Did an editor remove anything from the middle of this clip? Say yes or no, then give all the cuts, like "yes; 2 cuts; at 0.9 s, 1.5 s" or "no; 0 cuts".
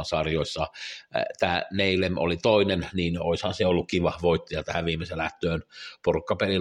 no; 0 cuts